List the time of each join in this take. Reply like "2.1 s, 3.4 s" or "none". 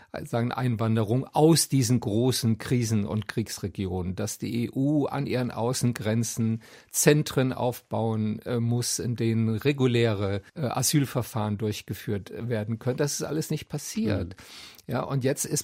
10.5 s

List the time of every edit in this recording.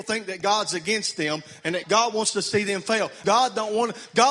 1.8 s, 3.2 s

